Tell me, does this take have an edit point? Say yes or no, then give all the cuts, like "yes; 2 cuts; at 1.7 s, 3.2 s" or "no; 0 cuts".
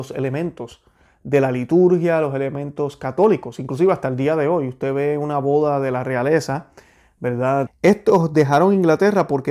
yes; 1 cut; at 7.7 s